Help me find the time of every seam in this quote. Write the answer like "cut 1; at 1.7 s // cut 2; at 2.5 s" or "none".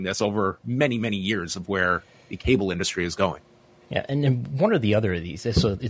none